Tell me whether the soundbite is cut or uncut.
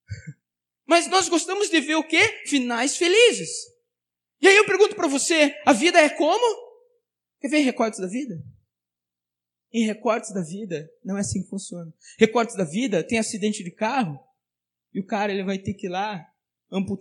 uncut